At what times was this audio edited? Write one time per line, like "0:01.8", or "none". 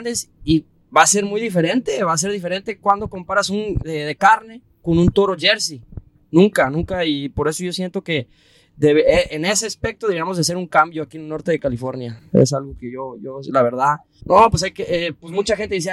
0:03.8
0:14.2